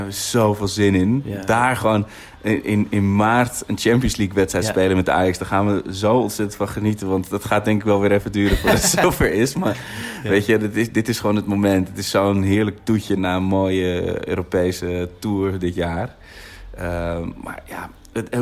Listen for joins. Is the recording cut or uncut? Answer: cut